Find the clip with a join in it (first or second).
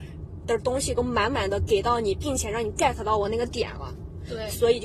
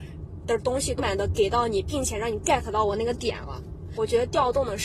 second